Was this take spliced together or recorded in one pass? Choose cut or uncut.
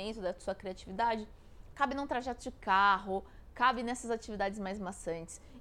cut